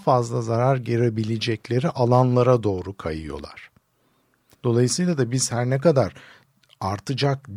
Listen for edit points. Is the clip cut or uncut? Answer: cut